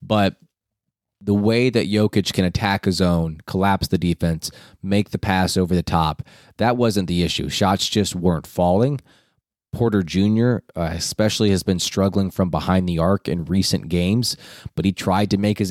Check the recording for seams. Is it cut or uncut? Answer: uncut